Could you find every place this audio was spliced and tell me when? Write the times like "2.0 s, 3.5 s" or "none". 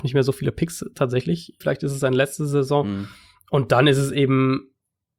1.6 s